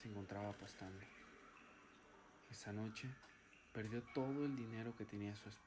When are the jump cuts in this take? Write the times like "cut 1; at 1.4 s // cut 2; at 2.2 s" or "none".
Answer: none